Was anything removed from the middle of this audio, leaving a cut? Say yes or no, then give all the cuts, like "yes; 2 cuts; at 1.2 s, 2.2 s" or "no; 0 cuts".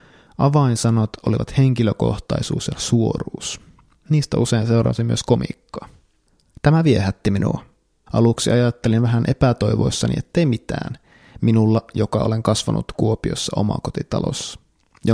yes; 1 cut; at 8.1 s